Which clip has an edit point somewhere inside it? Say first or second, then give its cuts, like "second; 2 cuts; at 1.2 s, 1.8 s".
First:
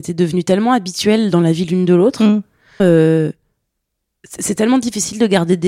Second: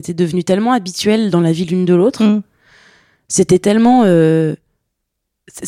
first; 1 cut; at 2.8 s